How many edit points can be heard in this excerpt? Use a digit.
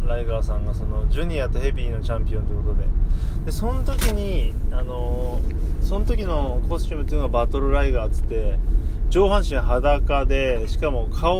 0